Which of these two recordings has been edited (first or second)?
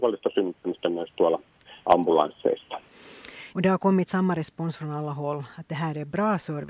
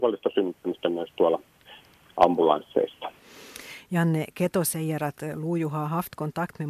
first